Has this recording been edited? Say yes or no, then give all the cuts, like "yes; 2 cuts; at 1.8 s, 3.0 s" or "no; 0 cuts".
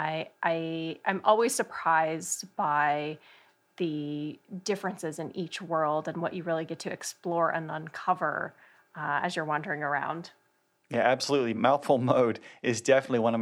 no; 0 cuts